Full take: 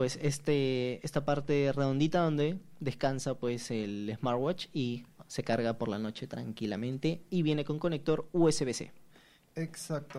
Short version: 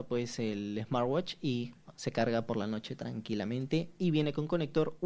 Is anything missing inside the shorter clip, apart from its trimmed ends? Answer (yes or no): no